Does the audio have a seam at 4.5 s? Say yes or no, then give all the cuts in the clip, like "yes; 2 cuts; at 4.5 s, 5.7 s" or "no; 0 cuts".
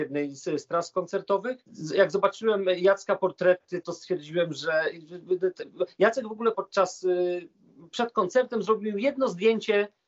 no; 1 cut; at 6.5 s